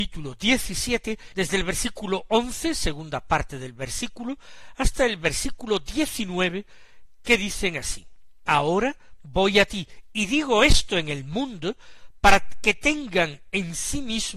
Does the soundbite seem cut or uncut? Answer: cut